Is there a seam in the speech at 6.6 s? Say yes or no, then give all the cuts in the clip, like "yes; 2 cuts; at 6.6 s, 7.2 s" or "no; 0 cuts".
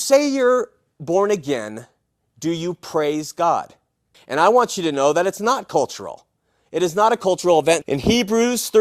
no; 2 cuts; at 4.1 s, 7.8 s